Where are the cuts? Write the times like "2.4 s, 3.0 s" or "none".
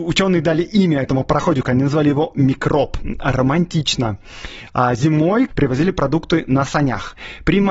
5.5 s